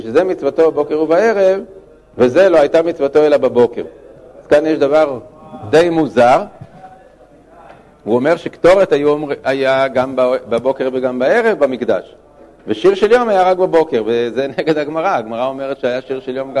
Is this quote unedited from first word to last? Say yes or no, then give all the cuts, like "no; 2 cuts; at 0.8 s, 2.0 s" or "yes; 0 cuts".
yes; 0 cuts